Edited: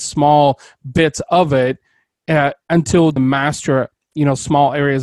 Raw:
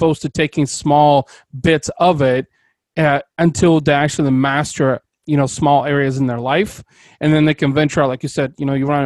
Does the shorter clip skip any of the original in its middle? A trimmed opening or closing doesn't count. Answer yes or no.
yes